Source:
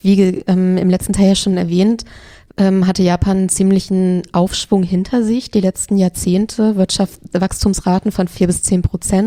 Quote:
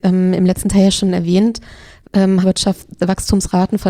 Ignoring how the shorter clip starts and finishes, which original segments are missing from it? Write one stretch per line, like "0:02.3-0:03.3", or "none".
0:02.8-0:06.7